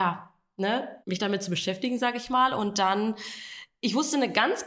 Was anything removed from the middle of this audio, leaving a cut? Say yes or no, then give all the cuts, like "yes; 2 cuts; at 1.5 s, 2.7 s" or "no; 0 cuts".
yes; 1 cut; at 1.0 s